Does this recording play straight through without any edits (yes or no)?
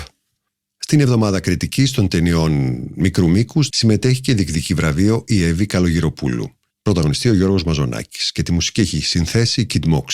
no